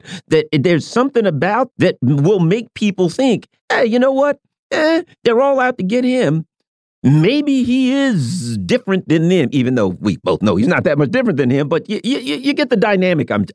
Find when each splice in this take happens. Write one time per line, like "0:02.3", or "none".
0:01.7